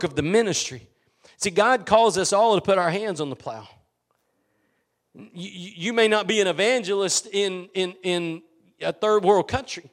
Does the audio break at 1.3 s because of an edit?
no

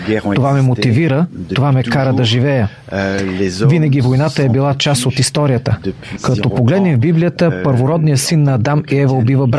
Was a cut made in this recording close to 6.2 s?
yes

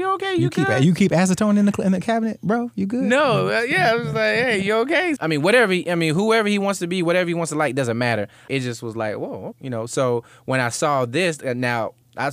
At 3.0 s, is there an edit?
no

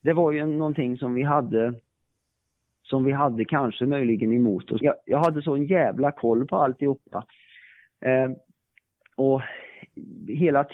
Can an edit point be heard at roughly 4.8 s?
yes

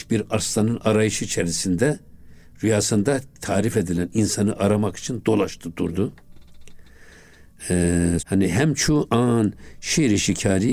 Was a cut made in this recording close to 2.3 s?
no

